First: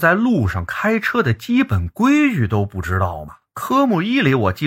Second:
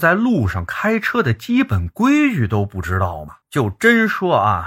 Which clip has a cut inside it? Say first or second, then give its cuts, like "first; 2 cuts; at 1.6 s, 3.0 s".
second; 1 cut; at 3.4 s